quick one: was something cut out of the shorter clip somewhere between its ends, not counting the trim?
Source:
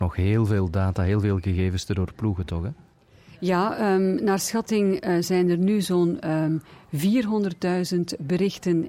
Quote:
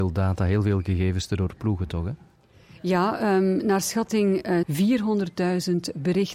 yes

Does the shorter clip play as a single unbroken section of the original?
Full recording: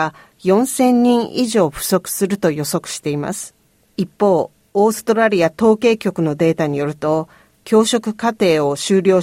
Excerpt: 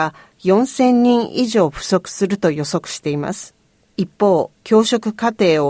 no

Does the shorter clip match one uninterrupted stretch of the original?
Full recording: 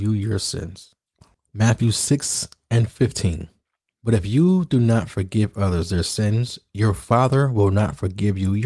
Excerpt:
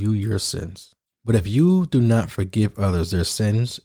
no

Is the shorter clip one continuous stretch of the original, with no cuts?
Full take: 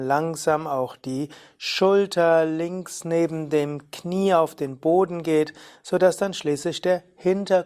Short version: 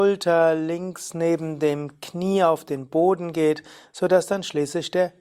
yes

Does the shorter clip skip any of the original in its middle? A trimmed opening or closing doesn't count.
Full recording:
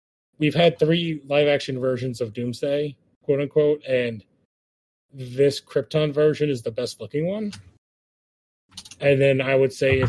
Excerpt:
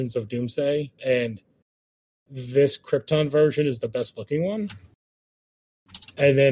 yes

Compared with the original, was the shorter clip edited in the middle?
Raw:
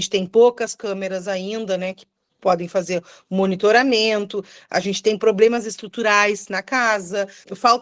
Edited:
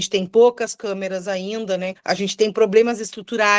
yes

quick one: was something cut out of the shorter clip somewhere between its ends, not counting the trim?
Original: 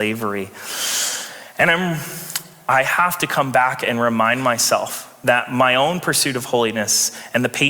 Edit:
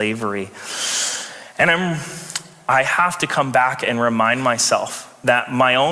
no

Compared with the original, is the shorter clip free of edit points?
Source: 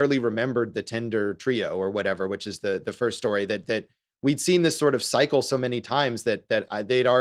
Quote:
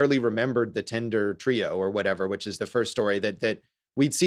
no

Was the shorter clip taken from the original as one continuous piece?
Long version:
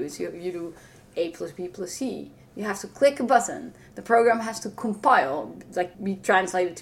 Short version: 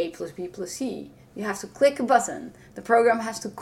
yes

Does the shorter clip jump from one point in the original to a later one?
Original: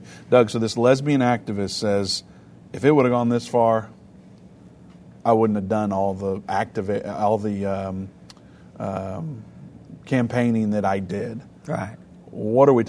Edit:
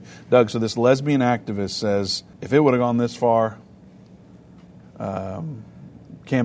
yes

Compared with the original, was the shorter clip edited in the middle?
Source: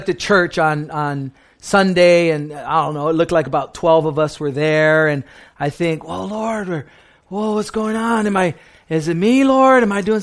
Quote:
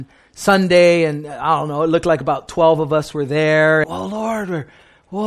yes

